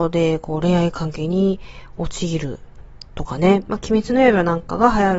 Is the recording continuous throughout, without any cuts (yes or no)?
no